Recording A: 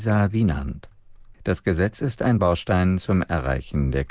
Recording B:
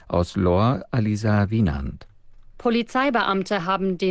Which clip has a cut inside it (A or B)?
A